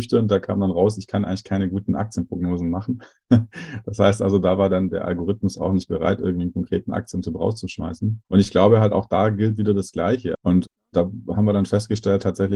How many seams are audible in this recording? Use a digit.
2